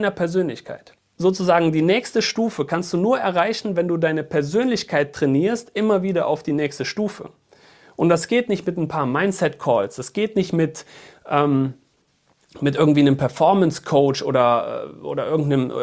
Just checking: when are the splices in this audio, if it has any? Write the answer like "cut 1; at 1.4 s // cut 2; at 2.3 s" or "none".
none